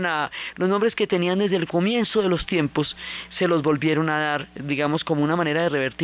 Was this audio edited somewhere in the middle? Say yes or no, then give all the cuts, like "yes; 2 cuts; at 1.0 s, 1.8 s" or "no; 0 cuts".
no; 0 cuts